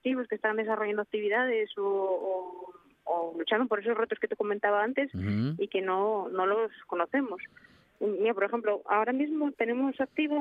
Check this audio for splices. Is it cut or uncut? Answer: uncut